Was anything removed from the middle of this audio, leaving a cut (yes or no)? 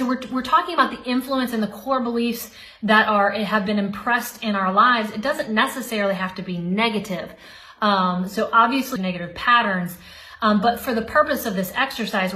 yes